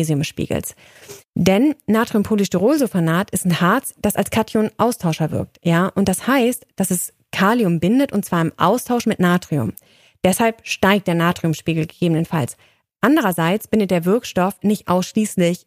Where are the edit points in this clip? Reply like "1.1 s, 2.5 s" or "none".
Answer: none